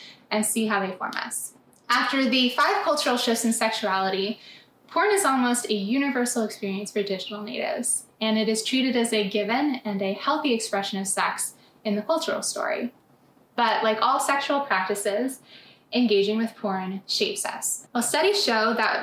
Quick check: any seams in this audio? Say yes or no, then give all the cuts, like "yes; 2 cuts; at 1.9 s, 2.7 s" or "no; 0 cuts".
yes; 2 cuts; at 1.8 s, 17.9 s